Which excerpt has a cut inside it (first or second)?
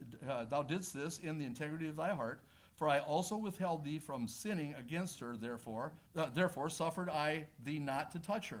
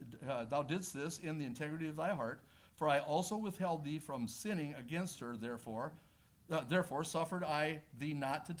first